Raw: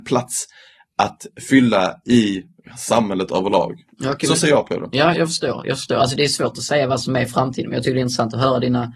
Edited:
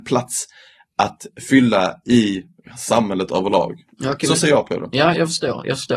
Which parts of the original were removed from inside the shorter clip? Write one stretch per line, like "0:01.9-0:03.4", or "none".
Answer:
none